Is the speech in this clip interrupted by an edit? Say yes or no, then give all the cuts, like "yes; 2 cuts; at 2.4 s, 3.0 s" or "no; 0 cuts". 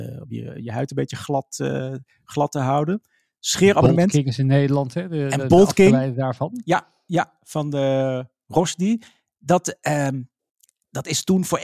no; 0 cuts